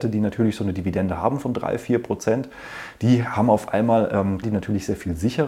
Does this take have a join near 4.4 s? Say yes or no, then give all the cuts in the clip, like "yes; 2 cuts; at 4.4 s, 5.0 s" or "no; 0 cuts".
yes; 1 cut; at 4.4 s